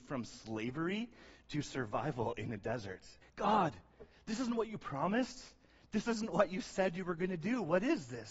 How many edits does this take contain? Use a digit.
1